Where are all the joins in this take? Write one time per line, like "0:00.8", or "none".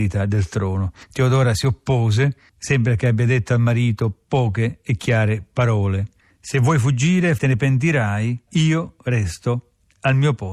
0:07.4
0:08.5